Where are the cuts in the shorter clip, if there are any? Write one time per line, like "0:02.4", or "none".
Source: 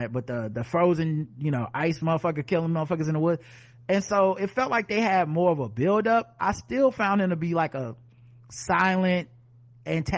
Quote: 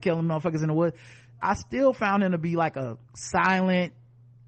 0:01.4
0:03.1